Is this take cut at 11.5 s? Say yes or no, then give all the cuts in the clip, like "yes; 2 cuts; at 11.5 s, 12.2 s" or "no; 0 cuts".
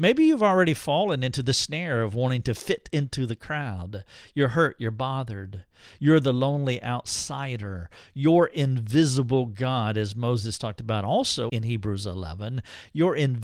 yes; 1 cut; at 11.5 s